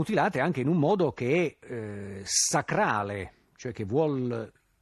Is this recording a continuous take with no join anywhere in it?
yes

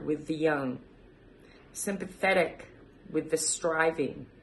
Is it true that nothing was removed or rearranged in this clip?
no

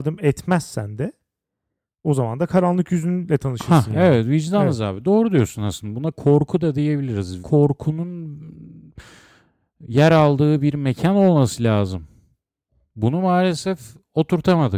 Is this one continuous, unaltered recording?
no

